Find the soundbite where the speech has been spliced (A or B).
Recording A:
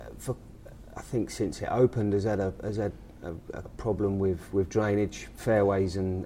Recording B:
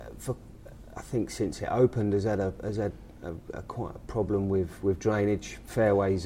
A